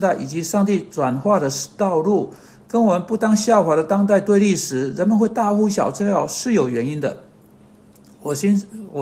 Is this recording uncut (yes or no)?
yes